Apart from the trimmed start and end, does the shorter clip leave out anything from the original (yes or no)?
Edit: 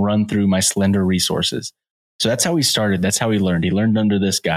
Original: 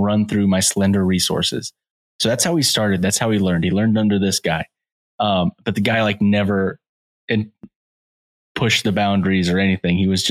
no